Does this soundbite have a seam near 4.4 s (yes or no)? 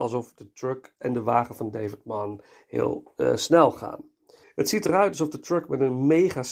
yes